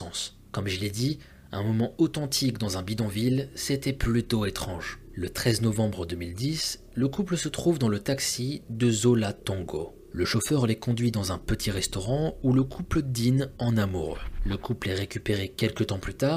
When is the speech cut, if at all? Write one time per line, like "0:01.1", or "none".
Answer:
none